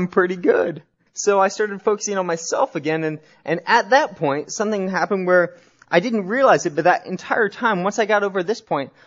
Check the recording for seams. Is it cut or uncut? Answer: cut